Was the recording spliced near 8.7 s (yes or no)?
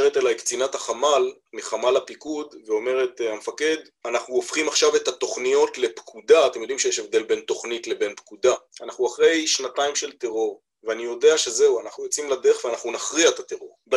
yes